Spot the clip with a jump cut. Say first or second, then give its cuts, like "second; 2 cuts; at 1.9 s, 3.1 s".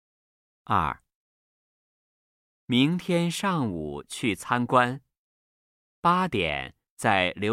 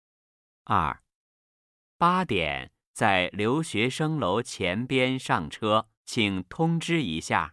second; 2 cuts; at 1.8 s, 5.9 s